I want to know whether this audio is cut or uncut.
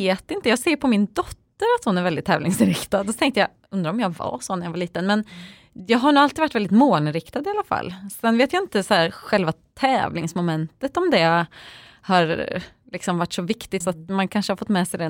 cut